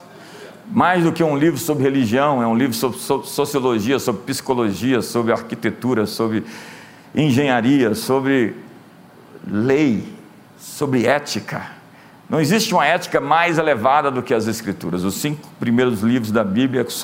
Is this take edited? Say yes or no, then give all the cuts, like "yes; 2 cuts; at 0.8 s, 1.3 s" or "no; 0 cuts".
no; 0 cuts